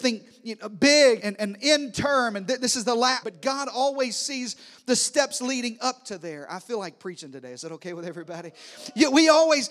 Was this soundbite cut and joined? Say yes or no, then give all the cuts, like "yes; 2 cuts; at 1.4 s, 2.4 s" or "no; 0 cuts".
yes; 2 cuts; at 1.2 s, 3.2 s